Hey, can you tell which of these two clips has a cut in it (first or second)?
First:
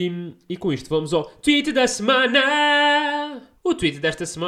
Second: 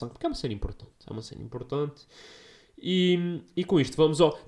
first